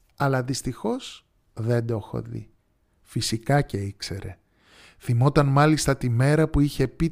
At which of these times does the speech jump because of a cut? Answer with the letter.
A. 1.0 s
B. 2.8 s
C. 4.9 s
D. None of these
B